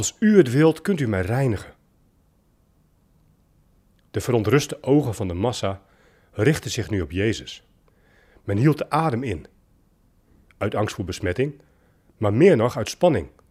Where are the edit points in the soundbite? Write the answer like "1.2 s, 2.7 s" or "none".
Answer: none